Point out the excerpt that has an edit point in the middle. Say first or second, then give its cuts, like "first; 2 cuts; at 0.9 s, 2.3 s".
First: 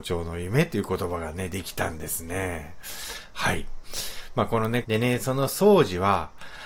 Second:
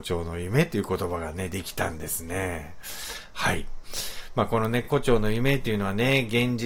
first; 1 cut; at 4.8 s